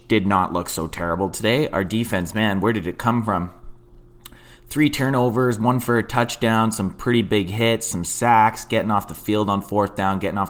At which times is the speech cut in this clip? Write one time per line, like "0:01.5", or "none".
none